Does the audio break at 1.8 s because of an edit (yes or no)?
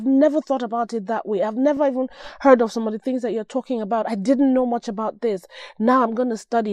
no